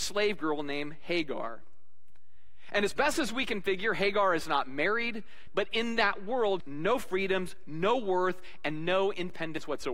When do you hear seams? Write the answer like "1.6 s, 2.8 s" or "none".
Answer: 5.5 s, 6.6 s

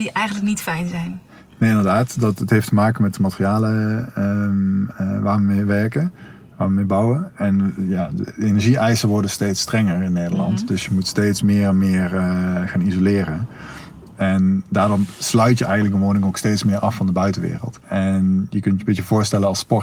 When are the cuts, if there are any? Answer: none

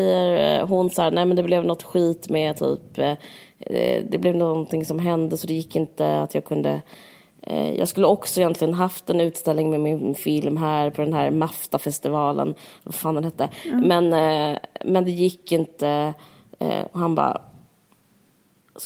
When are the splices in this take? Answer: none

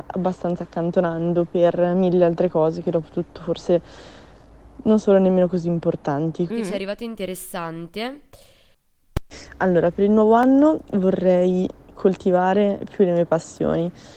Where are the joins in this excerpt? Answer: 6.5 s

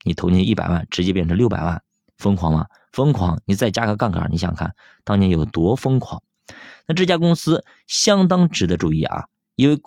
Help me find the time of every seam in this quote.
none

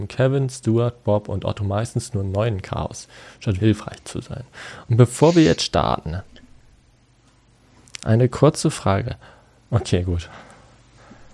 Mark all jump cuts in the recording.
3.6 s, 9.6 s

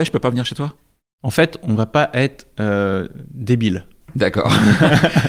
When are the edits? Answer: none

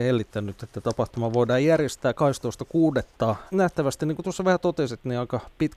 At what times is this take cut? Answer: 3.5 s

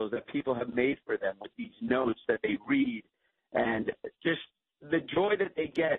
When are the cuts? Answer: none

